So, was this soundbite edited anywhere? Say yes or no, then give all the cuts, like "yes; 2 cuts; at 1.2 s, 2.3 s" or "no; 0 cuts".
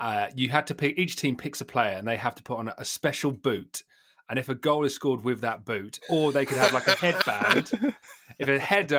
no; 0 cuts